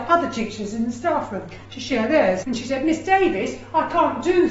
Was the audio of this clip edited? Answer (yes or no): yes